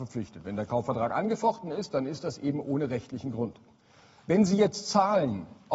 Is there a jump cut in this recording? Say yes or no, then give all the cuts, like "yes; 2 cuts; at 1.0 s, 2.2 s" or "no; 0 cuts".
no; 0 cuts